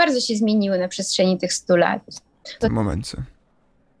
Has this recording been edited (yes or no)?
yes